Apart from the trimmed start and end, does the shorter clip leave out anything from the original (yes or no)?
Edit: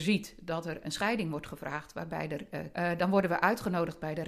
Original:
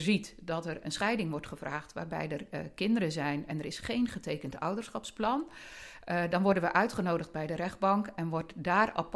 yes